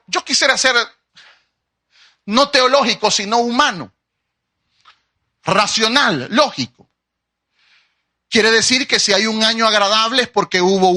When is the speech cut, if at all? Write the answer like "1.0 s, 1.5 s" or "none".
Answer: none